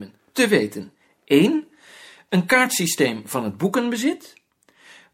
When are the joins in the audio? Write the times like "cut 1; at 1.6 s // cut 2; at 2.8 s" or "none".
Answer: none